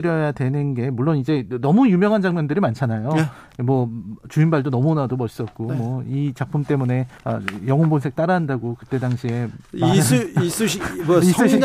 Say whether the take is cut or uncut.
cut